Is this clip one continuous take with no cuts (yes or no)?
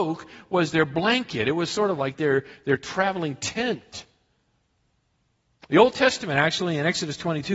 yes